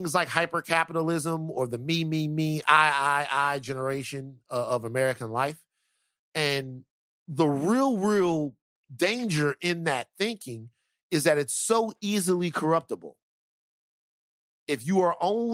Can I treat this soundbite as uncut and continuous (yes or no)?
yes